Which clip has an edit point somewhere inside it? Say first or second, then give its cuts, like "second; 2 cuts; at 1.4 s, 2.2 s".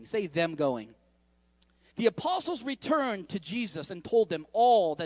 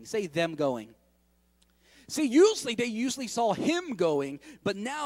first; 1 cut; at 1.9 s